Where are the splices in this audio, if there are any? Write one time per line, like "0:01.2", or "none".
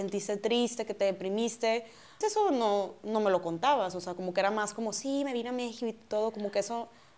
0:02.2

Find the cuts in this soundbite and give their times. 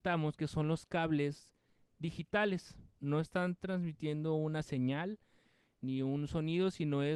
0:03.0

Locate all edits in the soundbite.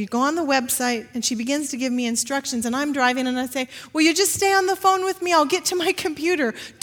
none

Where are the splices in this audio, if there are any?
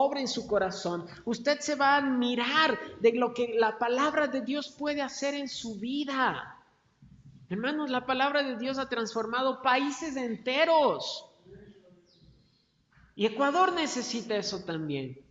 none

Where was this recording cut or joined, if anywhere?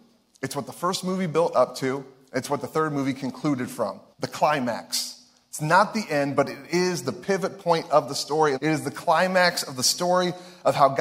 0:04.1
0:08.5

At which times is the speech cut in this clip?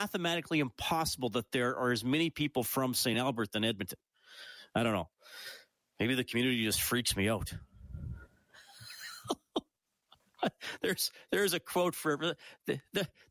0:03.1

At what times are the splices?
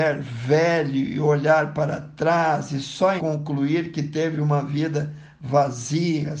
0:03.2

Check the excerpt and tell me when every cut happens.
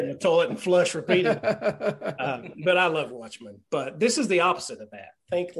none

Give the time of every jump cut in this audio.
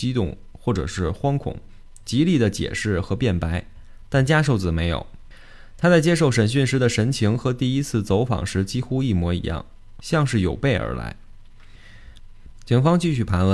0:10.0
0:12.2

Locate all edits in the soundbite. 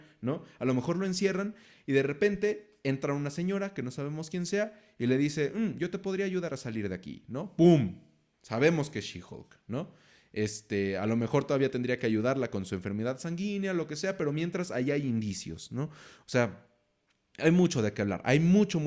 none

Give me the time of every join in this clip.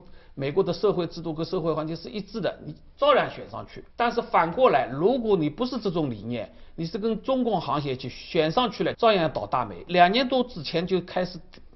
0:03.9
0:08.9

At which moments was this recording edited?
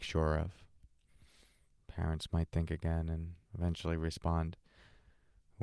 0:01.8
0:03.5

